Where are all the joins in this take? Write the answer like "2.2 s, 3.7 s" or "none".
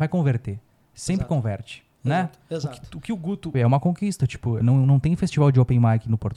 3.5 s, 4.6 s